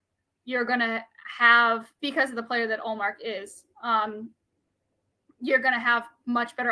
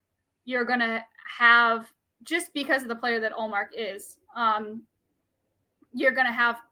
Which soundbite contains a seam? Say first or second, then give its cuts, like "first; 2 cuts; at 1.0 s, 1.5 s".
first; 1 cut; at 2.0 s